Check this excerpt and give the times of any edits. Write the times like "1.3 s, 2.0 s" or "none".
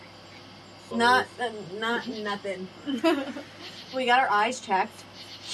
0.9 s